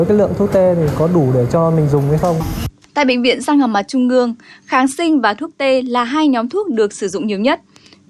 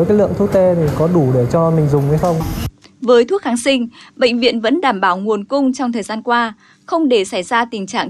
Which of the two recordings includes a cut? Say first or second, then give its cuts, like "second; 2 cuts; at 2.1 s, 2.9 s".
second; 1 cut; at 2.8 s